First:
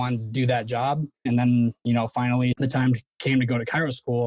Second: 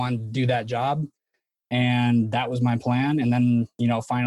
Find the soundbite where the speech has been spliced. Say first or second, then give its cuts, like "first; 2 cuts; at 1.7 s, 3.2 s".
first; 2 cuts; at 1.3 s, 2.5 s